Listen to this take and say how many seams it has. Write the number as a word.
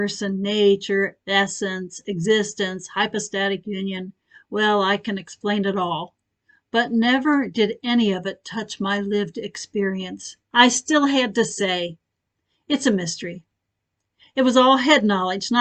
one